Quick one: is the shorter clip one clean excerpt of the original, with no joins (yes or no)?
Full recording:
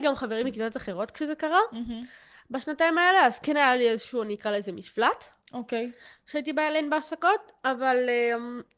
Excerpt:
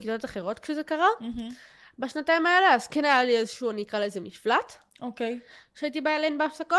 yes